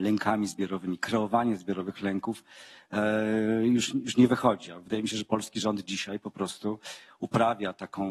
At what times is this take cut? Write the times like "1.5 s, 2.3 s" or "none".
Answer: none